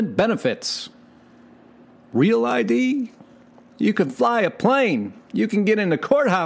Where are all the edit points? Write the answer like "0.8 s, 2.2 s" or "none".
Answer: none